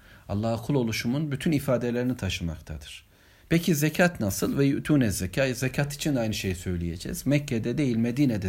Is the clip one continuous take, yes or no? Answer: no